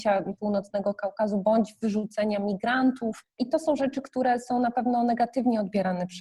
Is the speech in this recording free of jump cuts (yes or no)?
yes